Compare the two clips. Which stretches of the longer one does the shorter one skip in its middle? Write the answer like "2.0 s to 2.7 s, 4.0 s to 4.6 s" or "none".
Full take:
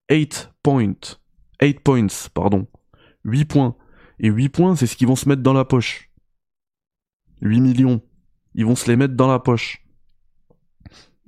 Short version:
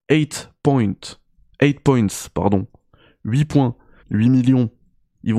4.0 s to 7.3 s